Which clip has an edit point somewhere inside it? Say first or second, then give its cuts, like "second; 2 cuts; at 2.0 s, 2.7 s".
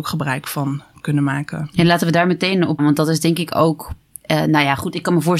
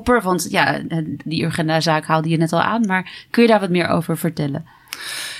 first; 1 cut; at 2.8 s